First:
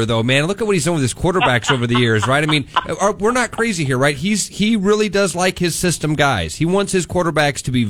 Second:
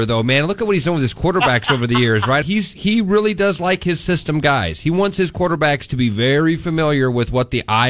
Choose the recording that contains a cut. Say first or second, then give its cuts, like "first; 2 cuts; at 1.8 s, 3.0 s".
second; 1 cut; at 2.4 s